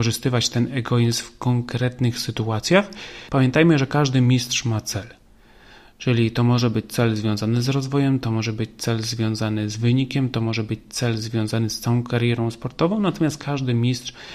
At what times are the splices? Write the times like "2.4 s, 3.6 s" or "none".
3.3 s